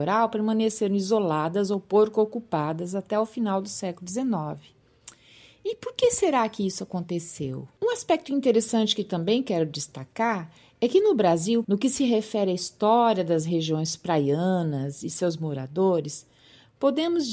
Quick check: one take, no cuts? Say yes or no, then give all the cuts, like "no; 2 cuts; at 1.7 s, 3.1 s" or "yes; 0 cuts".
no; 2 cuts; at 7.8 s, 11.6 s